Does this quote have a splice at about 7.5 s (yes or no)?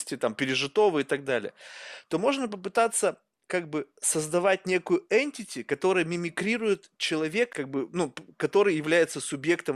yes